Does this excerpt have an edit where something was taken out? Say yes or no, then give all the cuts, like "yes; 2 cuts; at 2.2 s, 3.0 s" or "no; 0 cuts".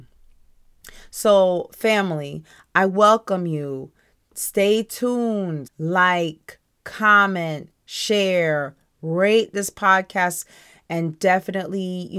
yes; 1 cut; at 5.7 s